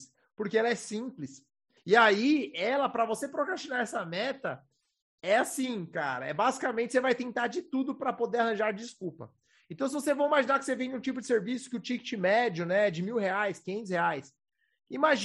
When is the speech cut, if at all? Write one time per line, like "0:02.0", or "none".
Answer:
0:01.8